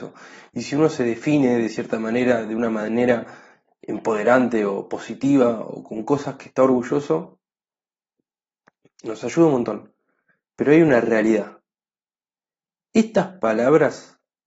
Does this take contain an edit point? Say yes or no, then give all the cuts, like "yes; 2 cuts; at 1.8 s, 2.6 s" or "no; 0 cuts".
no; 0 cuts